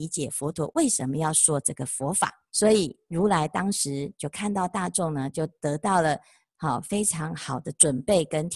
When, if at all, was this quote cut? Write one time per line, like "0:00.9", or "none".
0:02.5